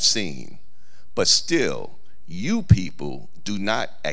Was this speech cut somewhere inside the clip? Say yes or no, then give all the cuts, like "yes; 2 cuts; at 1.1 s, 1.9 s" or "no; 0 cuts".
no; 0 cuts